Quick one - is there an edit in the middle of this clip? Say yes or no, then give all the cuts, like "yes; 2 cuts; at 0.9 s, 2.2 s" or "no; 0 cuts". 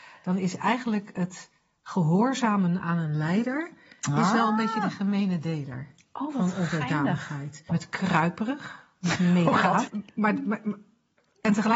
yes; 2 cuts; at 7.7 s, 9.9 s